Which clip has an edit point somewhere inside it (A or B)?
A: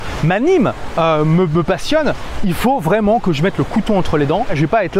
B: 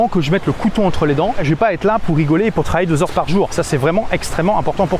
B